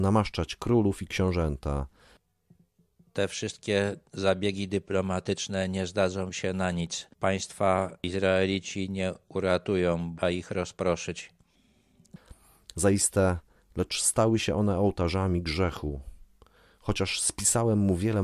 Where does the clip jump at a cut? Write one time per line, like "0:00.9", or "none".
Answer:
0:10.2
0:13.6

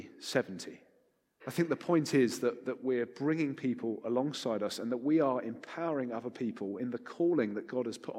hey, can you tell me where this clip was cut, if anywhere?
0:01.4

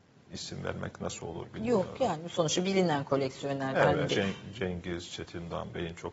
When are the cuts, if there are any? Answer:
0:04.1

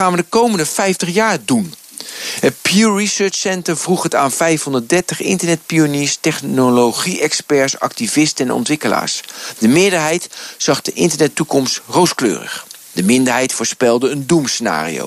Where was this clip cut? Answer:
none

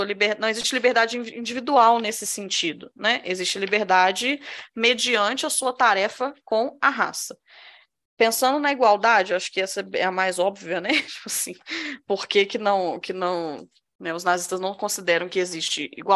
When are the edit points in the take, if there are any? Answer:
none

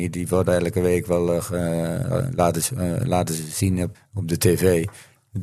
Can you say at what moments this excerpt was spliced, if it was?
0:03.9

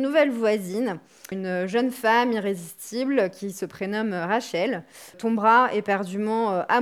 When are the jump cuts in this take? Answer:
0:01.3
0:05.1

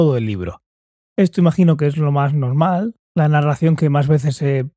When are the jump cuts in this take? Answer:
0:01.0
0:03.0

